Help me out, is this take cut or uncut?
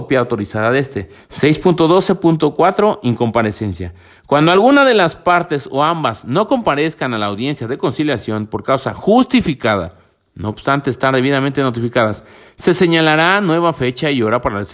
cut